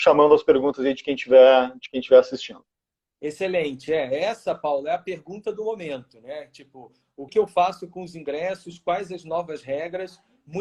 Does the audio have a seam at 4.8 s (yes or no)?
no